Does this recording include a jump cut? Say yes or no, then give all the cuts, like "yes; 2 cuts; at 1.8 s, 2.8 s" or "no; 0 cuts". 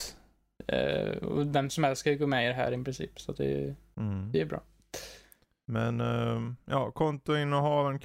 no; 0 cuts